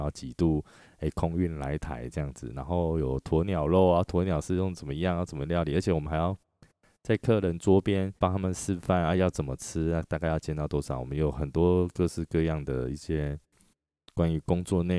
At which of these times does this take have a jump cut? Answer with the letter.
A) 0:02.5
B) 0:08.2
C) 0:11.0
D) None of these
B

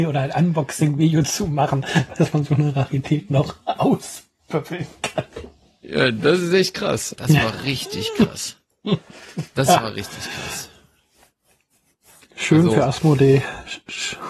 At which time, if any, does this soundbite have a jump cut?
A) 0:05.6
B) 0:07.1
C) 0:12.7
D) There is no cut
B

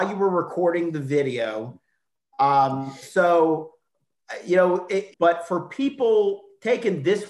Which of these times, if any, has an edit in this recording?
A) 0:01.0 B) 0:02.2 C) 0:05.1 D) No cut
C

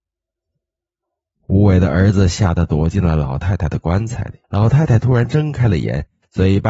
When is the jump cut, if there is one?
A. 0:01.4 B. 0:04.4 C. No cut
B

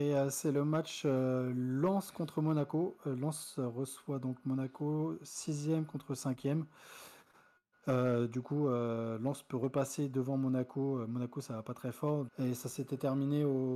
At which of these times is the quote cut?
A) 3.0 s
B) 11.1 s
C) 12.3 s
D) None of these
C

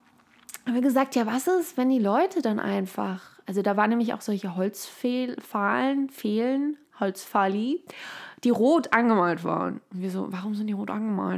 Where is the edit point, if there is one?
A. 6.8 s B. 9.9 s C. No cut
A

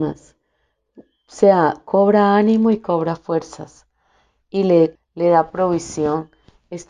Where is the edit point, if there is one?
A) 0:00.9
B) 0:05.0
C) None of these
B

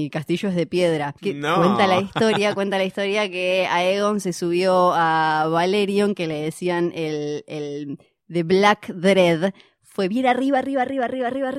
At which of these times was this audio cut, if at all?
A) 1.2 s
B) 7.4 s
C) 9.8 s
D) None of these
A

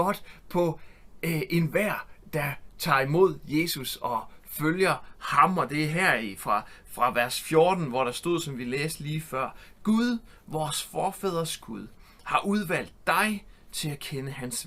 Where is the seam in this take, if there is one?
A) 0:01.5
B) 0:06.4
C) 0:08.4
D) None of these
D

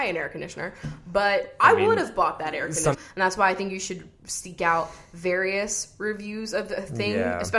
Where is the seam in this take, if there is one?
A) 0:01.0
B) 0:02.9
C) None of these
B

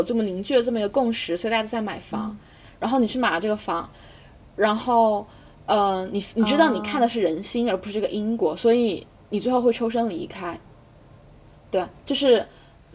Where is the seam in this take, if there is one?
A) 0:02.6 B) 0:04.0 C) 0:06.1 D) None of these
A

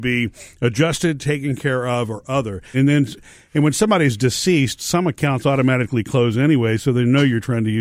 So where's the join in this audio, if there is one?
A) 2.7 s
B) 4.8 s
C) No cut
A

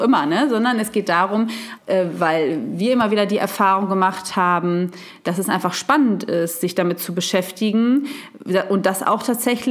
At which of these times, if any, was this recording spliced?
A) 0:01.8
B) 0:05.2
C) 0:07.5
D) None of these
A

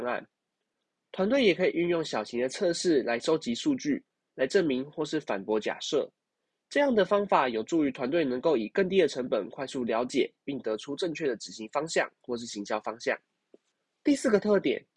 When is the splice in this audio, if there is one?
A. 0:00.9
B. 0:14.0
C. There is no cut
C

